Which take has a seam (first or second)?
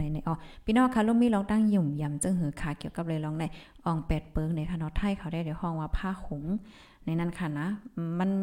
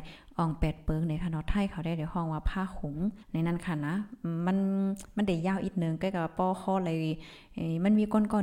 second